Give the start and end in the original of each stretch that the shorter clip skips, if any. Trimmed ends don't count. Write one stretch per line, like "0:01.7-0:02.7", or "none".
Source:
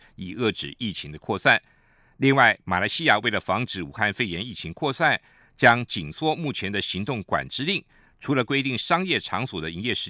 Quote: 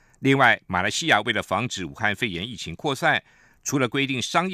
0:05.5-0:08.1